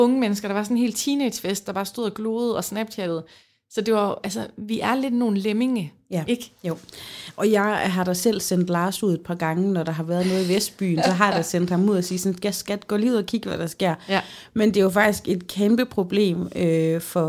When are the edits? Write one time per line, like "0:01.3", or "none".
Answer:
none